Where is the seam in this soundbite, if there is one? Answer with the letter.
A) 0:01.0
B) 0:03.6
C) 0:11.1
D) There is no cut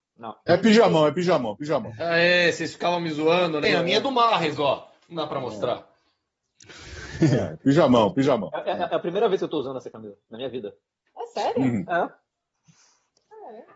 B